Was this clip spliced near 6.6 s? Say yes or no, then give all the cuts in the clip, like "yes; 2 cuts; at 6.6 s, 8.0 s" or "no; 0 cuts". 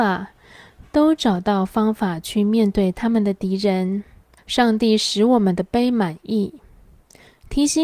no; 1 cut; at 4.4 s